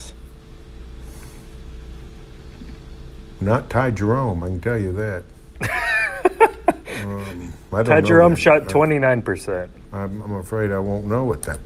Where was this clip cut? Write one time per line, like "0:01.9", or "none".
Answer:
0:10.2

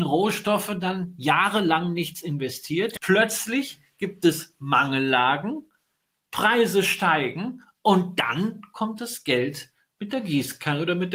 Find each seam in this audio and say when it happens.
0:03.0

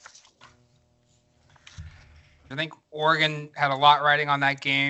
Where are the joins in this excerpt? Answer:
0:02.5

